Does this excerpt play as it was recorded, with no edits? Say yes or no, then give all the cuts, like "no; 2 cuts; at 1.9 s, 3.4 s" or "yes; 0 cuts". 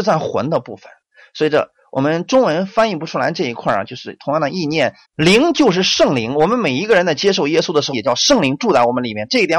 no; 2 cuts; at 5.0 s, 7.9 s